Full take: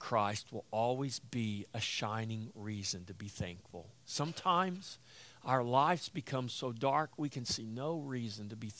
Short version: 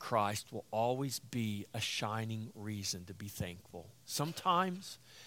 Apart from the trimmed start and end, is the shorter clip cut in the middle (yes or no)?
no